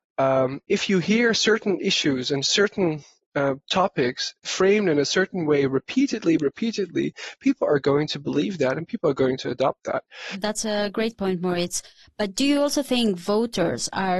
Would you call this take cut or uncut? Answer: uncut